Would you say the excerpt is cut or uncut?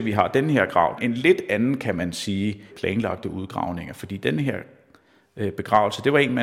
cut